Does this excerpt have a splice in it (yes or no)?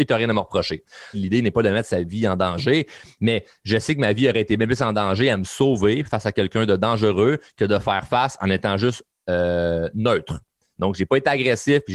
yes